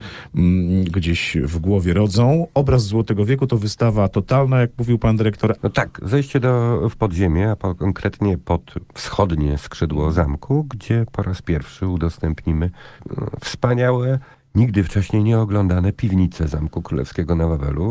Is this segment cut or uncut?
cut